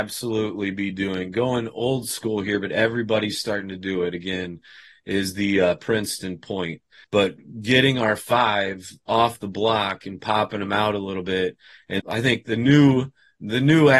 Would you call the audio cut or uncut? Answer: cut